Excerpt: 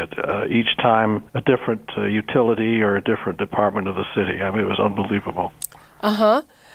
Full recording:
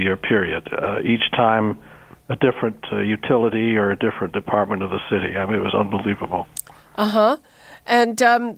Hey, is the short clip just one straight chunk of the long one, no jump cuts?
no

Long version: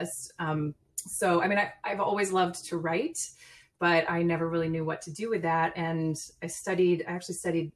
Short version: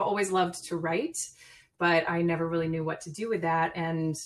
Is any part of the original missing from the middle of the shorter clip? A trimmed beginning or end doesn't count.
no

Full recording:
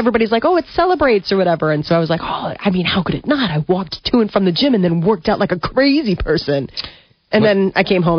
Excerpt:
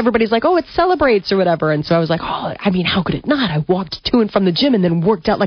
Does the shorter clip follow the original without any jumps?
yes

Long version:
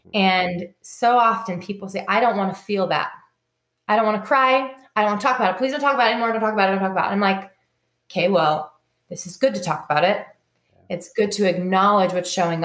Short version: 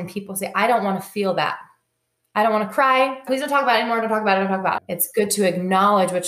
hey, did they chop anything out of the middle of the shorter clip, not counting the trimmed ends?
yes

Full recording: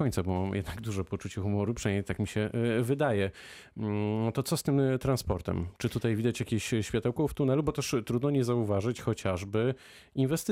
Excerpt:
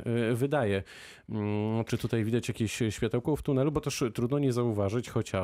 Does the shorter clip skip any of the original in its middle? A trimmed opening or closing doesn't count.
yes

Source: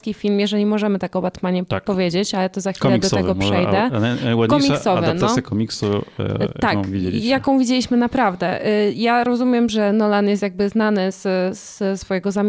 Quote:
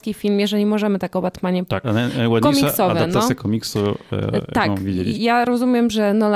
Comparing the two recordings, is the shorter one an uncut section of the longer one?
no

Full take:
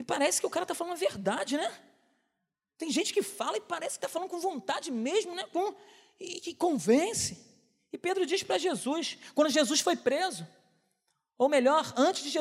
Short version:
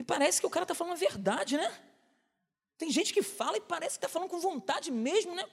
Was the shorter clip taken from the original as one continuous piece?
yes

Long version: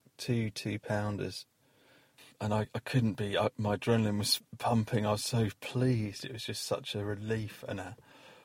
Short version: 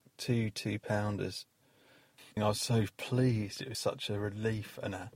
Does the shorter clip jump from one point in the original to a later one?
yes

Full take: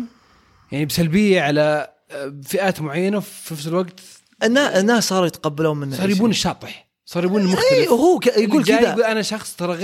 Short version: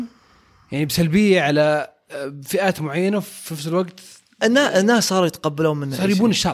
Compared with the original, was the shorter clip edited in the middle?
no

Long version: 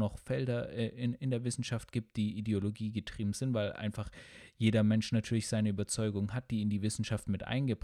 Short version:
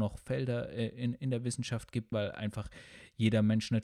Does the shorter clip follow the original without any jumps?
no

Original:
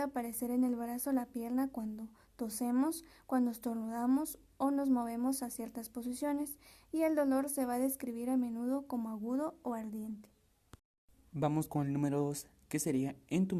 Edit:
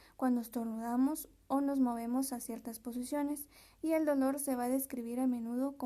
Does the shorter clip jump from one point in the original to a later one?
no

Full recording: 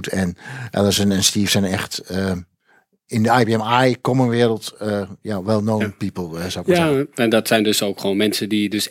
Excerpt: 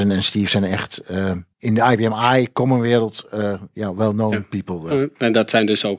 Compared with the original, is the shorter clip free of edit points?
no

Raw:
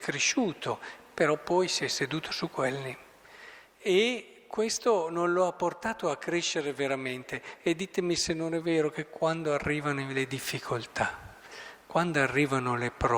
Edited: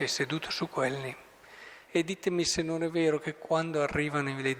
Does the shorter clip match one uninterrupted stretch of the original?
no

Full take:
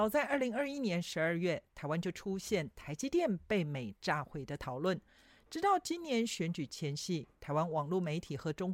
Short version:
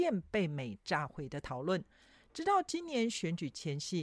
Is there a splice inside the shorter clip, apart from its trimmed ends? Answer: no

